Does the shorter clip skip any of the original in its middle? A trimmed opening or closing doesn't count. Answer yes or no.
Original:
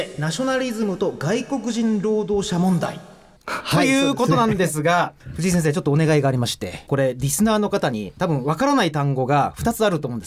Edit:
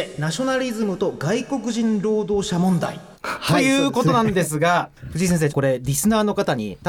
yes